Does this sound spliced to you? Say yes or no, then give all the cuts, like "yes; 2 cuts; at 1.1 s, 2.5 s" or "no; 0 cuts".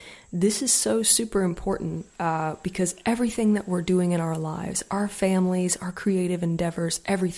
yes; 1 cut; at 2.1 s